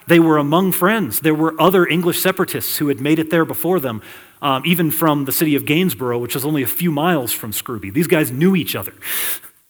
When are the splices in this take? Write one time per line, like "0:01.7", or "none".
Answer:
none